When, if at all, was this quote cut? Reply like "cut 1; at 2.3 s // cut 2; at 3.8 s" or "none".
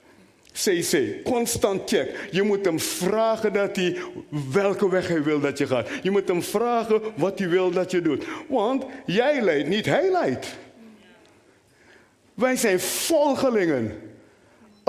none